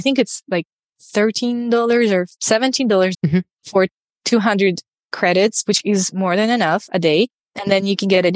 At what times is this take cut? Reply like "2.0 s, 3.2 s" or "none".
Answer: 3.1 s